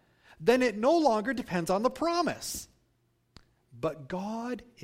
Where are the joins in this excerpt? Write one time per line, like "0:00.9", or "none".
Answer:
none